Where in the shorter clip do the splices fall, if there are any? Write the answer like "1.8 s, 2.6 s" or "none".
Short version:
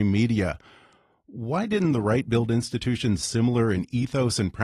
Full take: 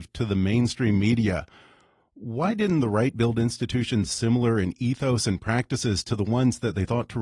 none